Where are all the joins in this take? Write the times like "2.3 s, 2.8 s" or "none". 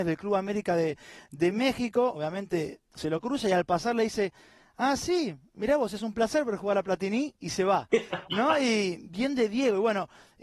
none